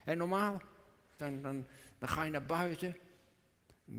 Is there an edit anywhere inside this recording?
yes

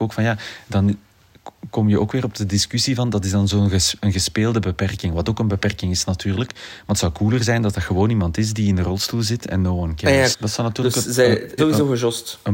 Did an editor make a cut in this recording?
yes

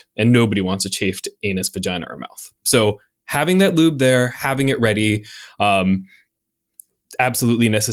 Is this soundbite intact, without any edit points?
no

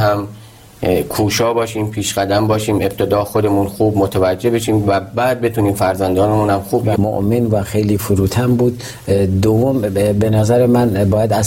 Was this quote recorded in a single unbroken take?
no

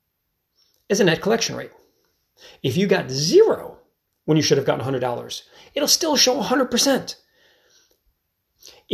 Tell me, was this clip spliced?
no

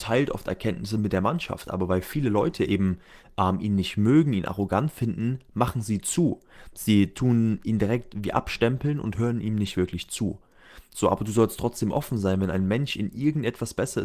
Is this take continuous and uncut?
yes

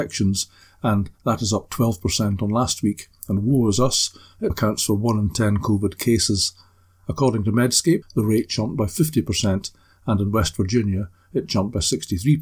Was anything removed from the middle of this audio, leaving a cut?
yes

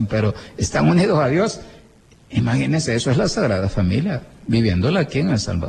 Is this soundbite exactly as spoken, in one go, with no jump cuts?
yes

